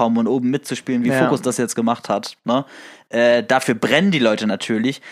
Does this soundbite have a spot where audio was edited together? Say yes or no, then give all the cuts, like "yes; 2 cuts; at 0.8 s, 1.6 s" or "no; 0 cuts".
no; 0 cuts